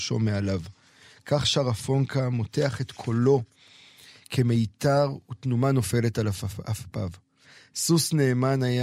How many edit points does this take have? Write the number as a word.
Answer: zero